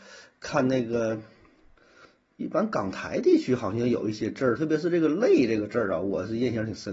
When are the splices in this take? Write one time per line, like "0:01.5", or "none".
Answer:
0:04.6

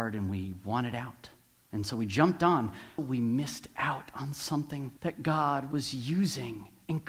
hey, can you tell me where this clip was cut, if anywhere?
0:03.0
0:05.0

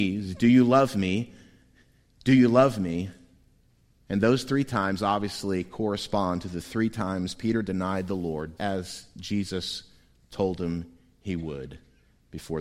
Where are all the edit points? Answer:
0:08.6

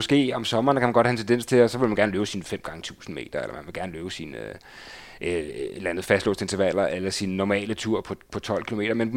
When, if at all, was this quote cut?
0:08.0

